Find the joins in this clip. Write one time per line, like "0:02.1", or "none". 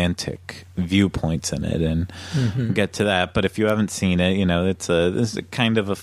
none